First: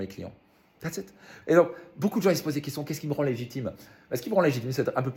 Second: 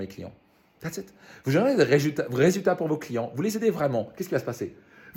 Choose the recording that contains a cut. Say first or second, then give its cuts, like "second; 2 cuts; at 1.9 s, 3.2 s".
first; 1 cut; at 1.4 s